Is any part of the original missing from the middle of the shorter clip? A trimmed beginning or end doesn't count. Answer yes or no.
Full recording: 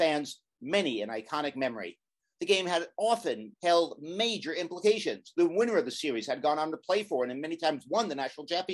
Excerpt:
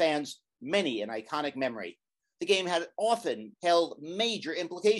no